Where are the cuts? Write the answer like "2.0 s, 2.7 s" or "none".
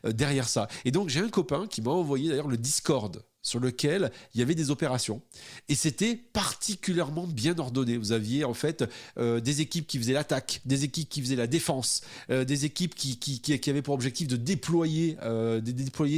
none